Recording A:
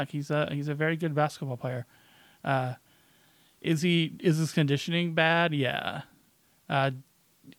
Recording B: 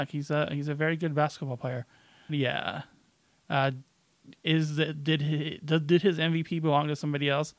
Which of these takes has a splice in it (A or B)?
B